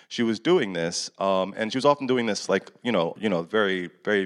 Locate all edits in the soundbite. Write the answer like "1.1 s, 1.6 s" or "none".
3.2 s